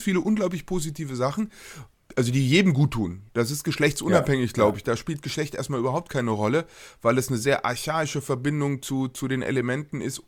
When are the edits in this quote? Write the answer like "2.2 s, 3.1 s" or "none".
none